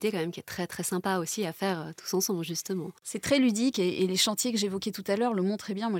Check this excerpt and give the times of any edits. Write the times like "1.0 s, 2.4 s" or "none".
none